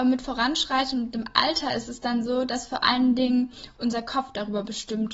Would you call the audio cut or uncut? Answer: uncut